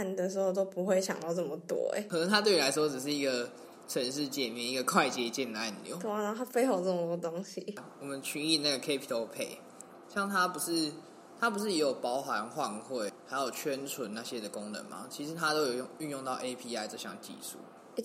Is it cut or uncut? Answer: uncut